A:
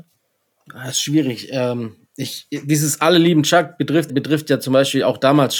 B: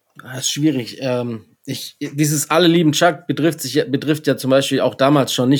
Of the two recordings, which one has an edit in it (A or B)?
A